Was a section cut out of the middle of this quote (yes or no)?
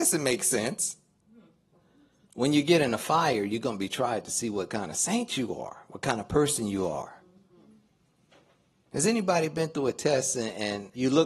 yes